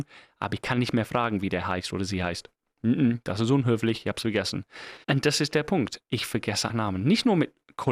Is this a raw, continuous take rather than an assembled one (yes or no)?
no